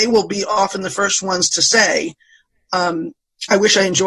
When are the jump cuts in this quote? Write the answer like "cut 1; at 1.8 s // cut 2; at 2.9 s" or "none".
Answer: none